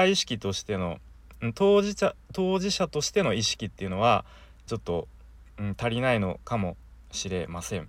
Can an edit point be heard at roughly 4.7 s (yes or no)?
yes